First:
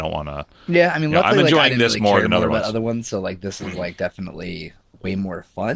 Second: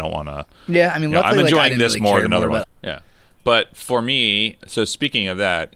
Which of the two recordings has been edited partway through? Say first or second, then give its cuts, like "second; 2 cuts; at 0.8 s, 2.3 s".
second; 2 cuts; at 2.6 s, 4.6 s